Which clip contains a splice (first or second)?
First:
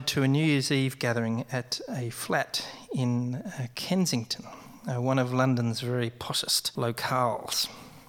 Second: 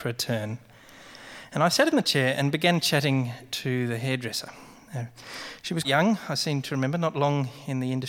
second